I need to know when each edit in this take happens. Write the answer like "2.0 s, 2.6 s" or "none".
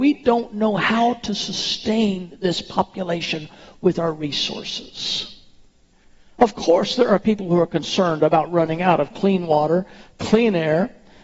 none